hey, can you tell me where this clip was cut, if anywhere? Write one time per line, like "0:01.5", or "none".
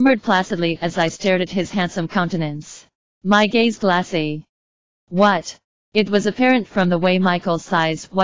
none

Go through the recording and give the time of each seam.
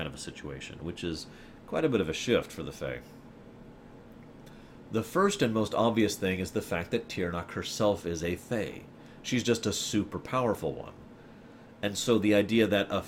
none

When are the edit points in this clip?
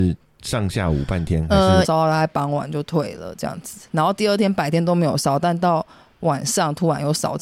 0:01.8

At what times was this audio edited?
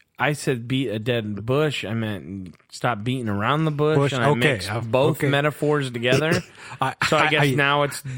none

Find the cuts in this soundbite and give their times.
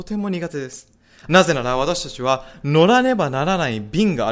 0:01.3

